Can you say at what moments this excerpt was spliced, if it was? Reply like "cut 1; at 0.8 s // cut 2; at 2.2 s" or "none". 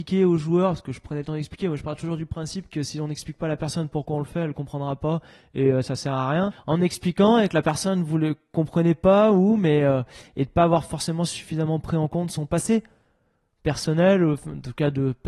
cut 1; at 6.5 s